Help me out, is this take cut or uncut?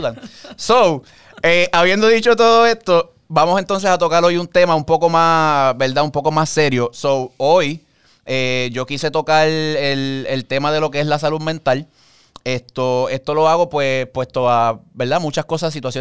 cut